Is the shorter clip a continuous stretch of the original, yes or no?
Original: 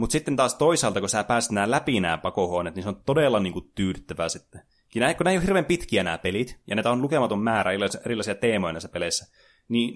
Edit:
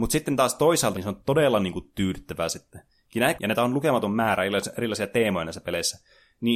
no